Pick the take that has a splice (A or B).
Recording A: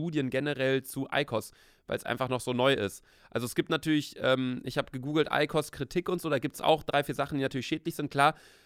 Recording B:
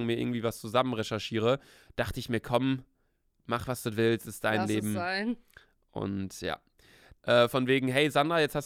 B